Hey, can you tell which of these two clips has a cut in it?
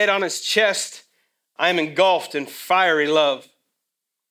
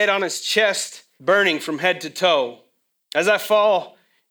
second; 2 cuts; at 1.2 s, 3.0 s

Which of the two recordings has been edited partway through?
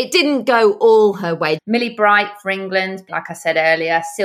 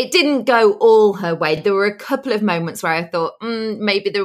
first; 2 cuts; at 1.6 s, 3.1 s

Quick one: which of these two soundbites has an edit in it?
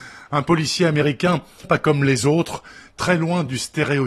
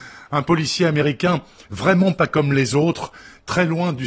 first; 1 cut; at 1.6 s

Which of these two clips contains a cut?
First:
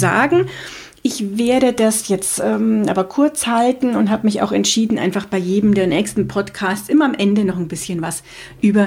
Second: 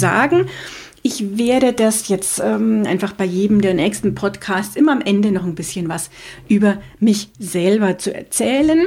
second; 1 cut; at 2.8 s

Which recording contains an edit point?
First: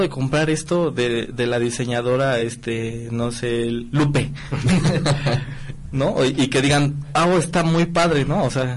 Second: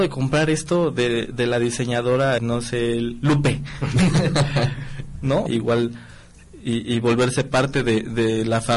second; 2 cuts; at 2.4 s, 5.5 s

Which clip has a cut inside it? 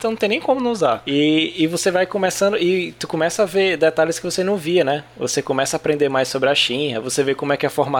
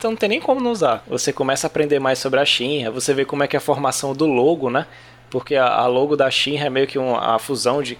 second; 1 cut; at 1.0 s

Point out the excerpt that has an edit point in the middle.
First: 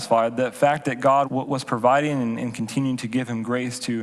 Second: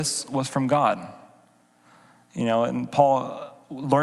first; 1 cut; at 1.2 s

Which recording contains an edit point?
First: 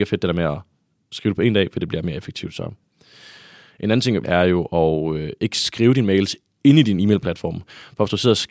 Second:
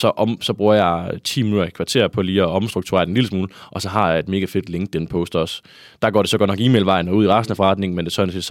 first; 1 cut; at 4.2 s

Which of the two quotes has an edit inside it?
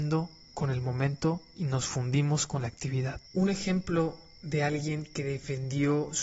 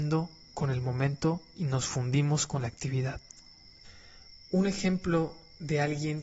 first; 1 cut; at 3.3 s

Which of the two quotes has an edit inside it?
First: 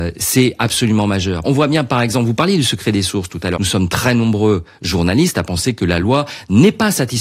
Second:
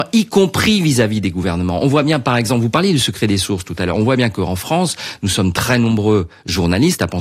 first; 2 cuts; at 1.4 s, 3.6 s

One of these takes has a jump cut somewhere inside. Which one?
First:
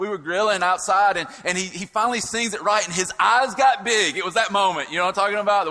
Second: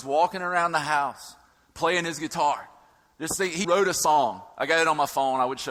second; 1 cut; at 3.6 s

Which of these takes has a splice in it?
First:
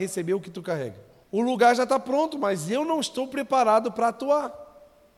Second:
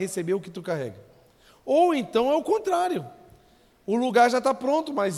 first; 1 cut; at 1.2 s

